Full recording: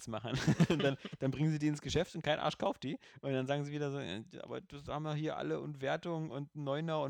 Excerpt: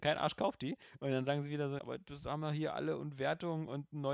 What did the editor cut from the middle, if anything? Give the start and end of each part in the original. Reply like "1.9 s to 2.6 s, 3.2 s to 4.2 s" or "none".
4.0 s to 4.4 s